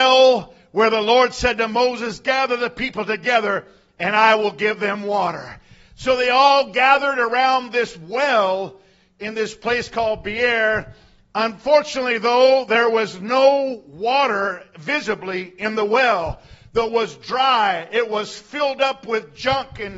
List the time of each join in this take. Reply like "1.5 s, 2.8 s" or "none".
16.9 s